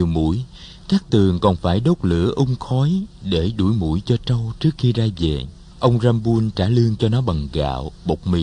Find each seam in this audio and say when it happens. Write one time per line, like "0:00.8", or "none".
0:05.7